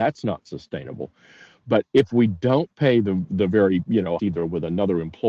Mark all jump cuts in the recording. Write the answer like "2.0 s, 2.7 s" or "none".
4.2 s